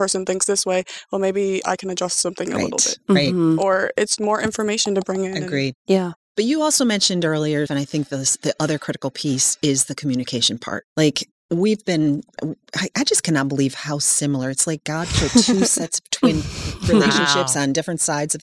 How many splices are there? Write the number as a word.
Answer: three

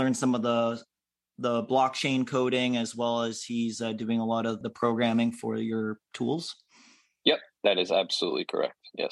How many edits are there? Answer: one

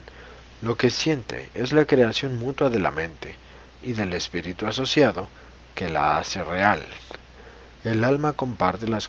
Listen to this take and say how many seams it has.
two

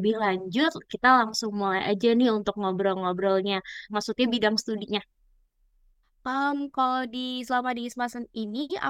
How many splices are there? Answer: one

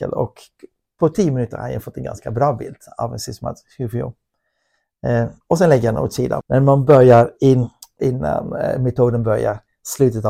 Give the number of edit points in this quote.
two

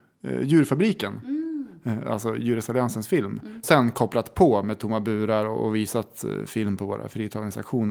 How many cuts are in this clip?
one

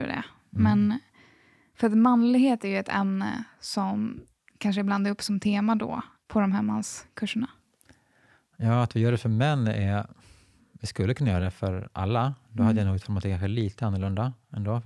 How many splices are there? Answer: zero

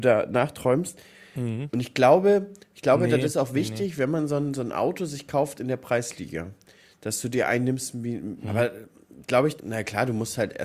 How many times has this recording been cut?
three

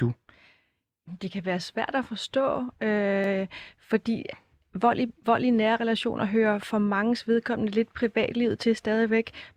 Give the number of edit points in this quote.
zero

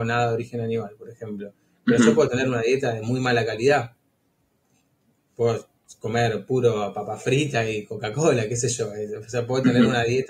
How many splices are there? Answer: zero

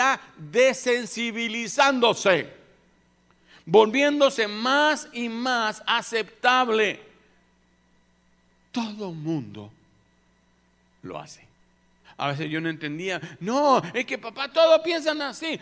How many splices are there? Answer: two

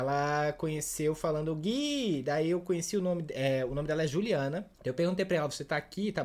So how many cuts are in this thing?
one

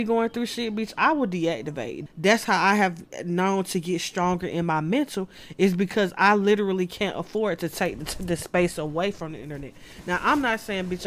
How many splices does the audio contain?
one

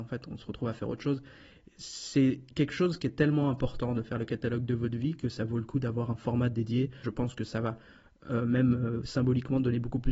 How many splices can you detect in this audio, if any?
one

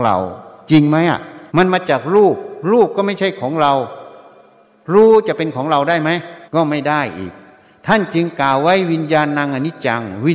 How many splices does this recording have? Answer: two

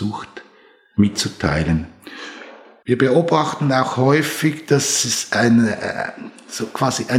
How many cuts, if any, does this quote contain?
one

